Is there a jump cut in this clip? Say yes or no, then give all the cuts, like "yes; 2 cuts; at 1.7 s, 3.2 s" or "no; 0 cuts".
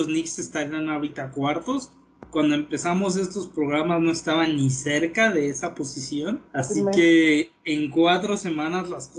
yes; 1 cut; at 6.5 s